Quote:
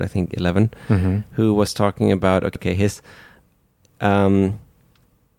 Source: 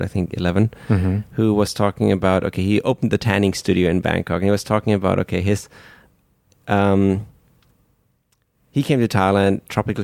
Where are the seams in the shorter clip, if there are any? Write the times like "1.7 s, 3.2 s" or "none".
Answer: 2.6 s